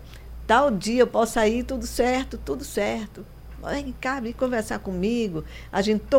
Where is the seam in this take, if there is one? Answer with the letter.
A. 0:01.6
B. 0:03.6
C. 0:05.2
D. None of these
D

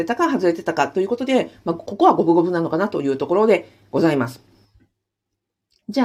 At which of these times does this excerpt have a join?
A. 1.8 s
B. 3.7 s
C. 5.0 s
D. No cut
D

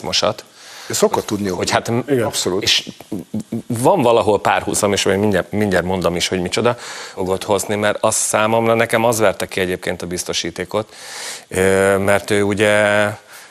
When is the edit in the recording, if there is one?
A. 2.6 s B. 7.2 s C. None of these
B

